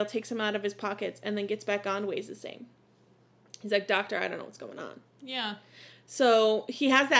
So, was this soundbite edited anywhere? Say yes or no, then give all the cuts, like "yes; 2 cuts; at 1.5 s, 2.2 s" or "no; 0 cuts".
no; 0 cuts